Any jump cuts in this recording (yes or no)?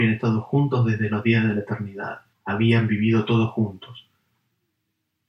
yes